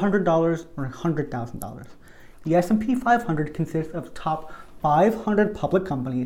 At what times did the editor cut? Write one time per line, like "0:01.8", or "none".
0:02.3